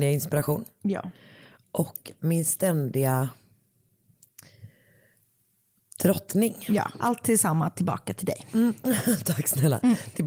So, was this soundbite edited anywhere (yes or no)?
no